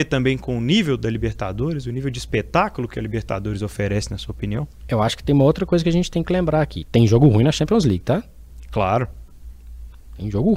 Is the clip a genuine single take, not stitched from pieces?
yes; 0 cuts

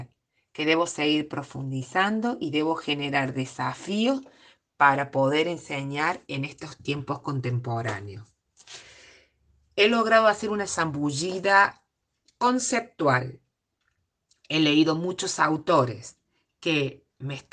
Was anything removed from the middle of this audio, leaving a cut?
no; 0 cuts

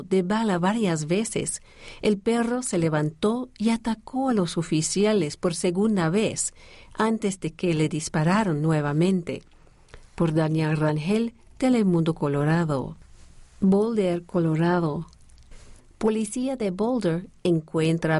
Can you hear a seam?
yes; 1 cut; at 15.8 s

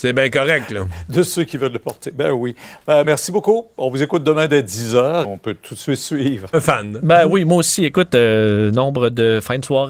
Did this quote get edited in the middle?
yes; 3 cuts; at 3.0 s, 5.2 s, 6.5 s

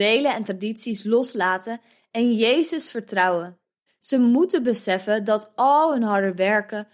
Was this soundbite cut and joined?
yes; 1 cut; at 3.9 s

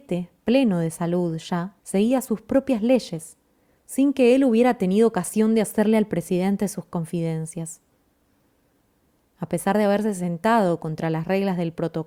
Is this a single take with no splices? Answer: no; 1 cut; at 1.8 s

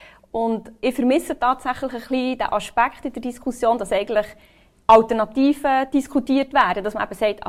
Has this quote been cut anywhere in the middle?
no; 0 cuts

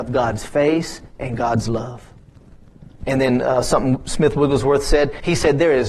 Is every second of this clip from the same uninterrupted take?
no; 1 cut; at 3.0 s

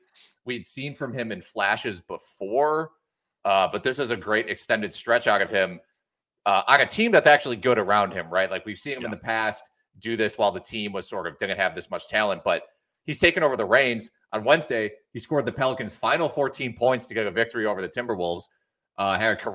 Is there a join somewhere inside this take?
no; 0 cuts

